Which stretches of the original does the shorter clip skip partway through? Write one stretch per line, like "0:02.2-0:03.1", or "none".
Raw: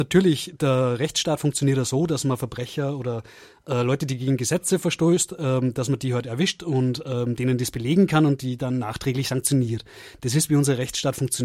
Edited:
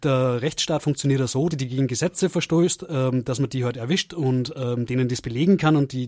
0:02.1-0:04.0